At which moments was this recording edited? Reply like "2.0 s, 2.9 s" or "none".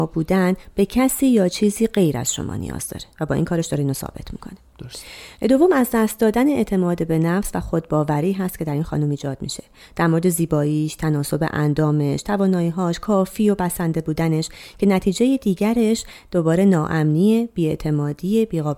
none

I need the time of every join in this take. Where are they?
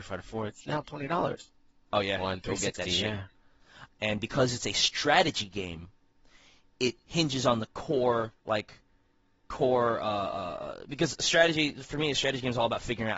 3.9 s, 8.4 s

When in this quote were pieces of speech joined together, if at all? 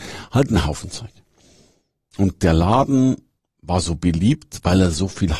none

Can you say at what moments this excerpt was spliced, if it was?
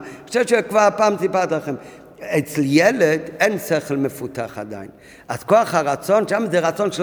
none

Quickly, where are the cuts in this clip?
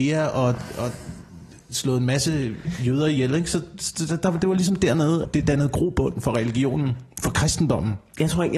5.2 s

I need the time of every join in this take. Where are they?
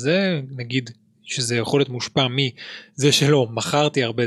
none

